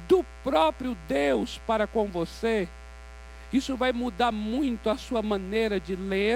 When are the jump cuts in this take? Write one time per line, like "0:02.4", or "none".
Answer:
none